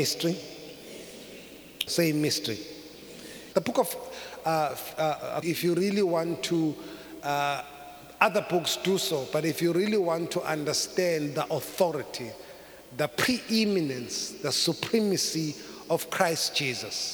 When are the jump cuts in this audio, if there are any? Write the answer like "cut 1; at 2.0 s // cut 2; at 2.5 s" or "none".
cut 1; at 1.9 s // cut 2; at 3.5 s // cut 3; at 5.4 s